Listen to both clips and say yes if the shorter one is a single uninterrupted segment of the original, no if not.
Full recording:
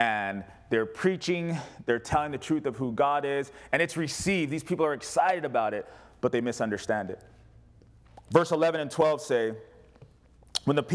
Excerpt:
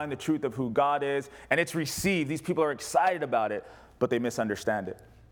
yes